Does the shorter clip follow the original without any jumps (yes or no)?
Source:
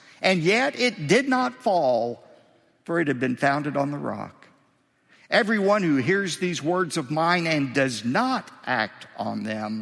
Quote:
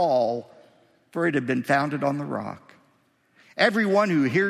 yes